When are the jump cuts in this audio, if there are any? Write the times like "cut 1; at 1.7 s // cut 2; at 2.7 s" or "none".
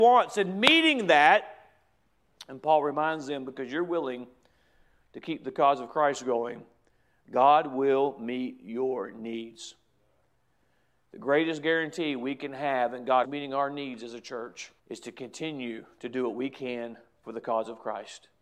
cut 1; at 13.2 s // cut 2; at 14.8 s